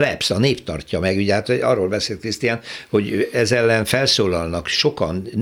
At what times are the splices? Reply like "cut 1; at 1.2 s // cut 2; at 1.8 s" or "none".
none